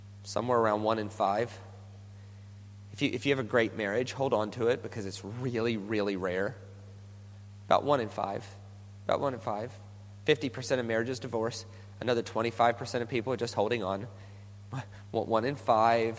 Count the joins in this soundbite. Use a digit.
0